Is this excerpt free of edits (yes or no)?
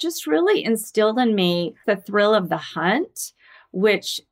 no